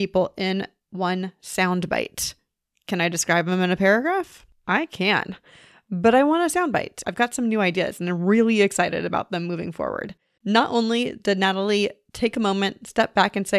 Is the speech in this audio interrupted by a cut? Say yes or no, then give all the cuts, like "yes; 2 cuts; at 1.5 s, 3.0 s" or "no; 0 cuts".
yes; 2 cuts; at 7.0 s, 10.4 s